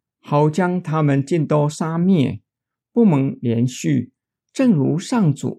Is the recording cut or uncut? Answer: uncut